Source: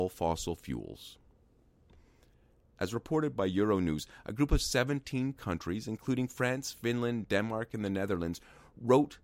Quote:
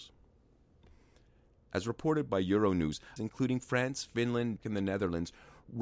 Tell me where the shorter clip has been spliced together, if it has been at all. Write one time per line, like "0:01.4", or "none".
0:03.2
0:04.6